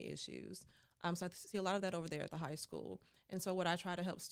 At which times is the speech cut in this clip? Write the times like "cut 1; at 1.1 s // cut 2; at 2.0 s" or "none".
none